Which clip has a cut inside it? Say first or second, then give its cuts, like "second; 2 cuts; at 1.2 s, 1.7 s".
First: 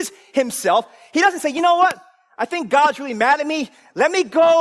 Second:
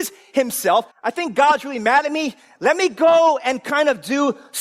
second; 1 cut; at 0.9 s